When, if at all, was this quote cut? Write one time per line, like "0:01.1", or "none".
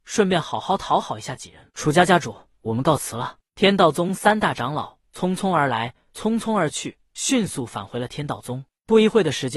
0:01.7